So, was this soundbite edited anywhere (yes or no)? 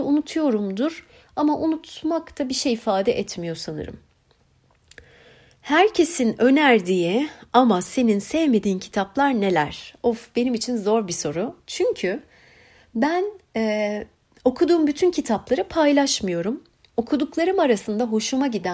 no